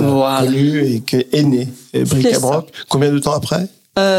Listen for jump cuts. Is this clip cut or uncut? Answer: uncut